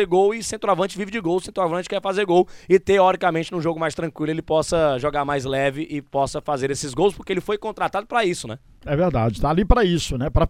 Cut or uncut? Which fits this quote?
uncut